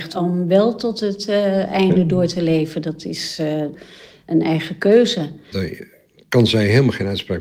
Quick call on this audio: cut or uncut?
cut